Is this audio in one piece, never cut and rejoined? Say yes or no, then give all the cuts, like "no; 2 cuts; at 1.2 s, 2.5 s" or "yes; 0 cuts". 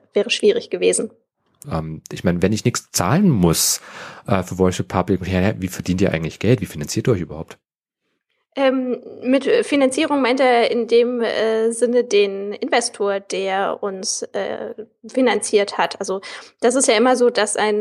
no; 1 cut; at 1.6 s